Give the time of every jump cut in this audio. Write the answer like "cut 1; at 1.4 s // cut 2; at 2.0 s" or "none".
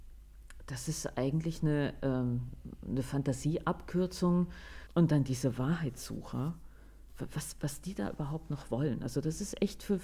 cut 1; at 4.9 s